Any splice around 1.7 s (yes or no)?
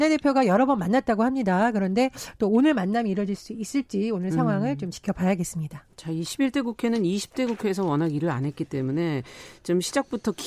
no